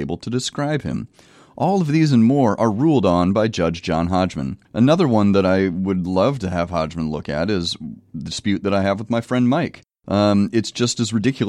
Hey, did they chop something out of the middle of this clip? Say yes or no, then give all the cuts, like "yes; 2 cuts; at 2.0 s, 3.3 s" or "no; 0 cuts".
yes; 1 cut; at 4.6 s